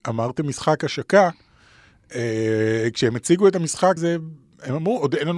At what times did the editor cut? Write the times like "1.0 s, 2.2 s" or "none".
4.0 s